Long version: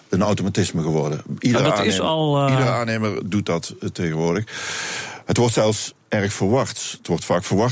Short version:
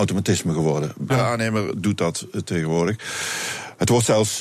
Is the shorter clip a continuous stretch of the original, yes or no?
no